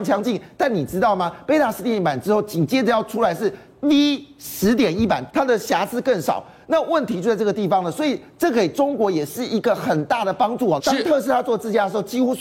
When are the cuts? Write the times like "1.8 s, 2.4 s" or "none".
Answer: 5.3 s, 10.8 s